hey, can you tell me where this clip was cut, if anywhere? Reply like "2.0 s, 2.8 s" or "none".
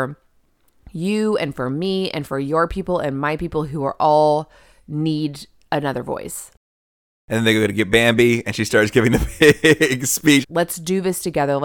10.4 s

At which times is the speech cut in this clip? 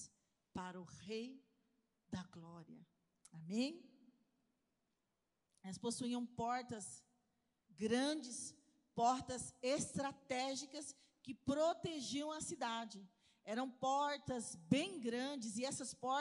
5.5 s

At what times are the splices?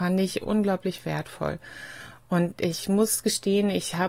none

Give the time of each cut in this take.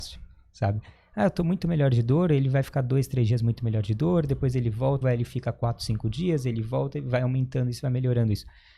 5.0 s

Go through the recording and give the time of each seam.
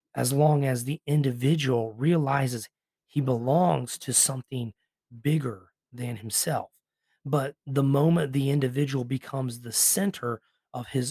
none

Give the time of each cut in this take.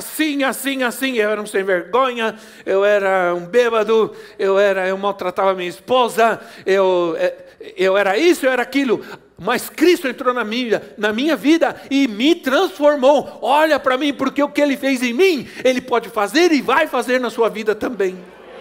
none

